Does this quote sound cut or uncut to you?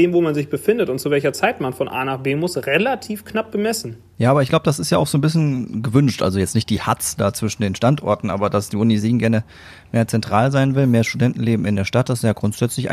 uncut